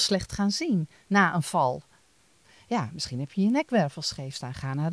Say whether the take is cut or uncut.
uncut